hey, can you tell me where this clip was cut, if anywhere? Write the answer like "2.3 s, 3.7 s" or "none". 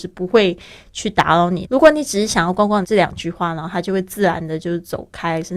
1.6 s, 2.8 s

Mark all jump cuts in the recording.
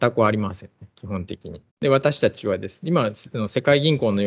1.7 s

